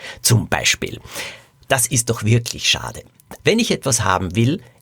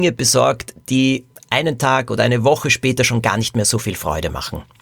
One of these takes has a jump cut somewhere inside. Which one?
first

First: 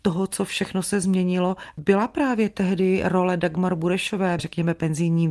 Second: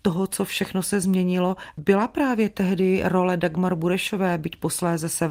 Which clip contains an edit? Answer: first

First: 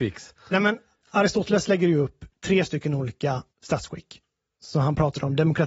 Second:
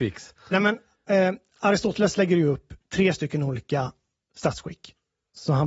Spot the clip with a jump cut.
first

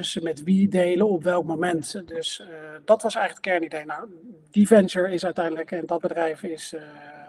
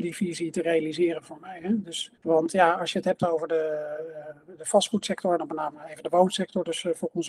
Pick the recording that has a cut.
second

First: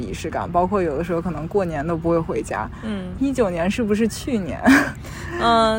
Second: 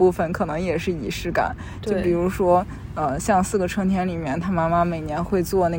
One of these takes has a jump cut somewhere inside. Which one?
first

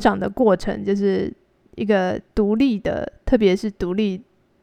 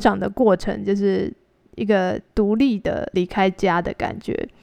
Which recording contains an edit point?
second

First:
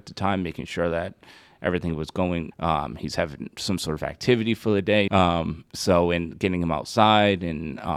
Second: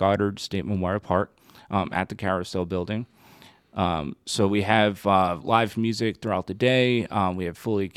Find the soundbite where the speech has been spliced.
first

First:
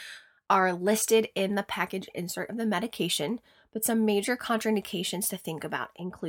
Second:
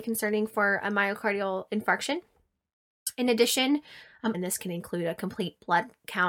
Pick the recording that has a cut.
second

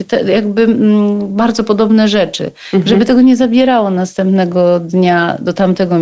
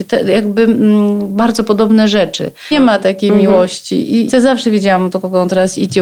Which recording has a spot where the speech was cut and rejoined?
second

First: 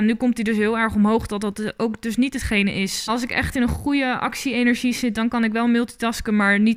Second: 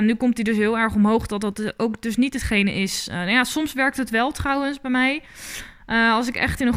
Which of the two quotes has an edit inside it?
first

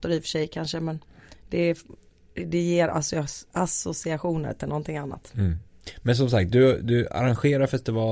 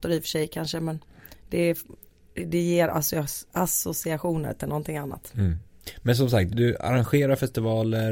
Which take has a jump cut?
second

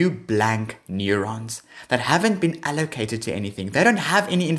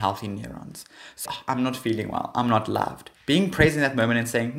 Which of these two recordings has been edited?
second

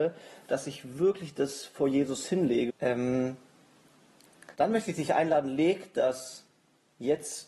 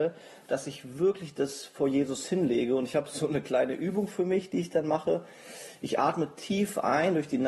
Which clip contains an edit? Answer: first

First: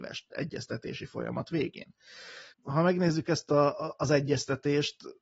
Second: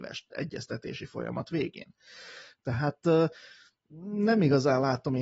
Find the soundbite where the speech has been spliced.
first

